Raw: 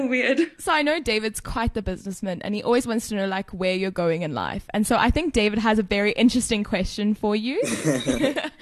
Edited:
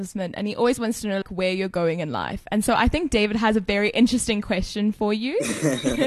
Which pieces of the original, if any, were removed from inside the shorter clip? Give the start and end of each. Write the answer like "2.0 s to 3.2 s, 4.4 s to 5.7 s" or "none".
3.3 s to 3.4 s